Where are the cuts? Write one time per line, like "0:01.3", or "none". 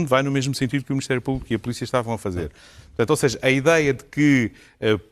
none